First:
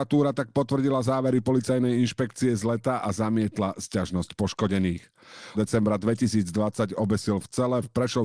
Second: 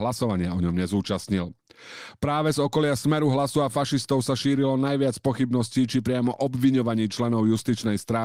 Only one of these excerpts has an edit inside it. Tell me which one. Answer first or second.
first